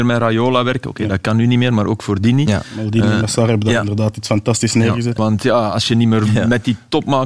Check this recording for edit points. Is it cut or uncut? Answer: cut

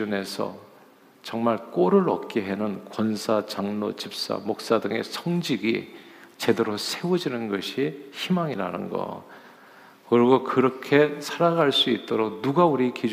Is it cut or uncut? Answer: uncut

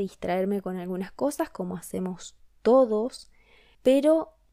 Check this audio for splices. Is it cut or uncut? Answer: uncut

